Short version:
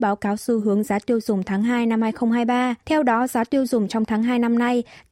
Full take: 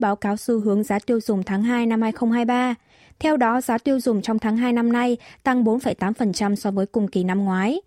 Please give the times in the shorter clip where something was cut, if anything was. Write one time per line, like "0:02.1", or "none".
0:02.8